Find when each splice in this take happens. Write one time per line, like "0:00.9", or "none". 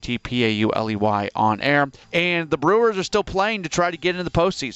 0:02.0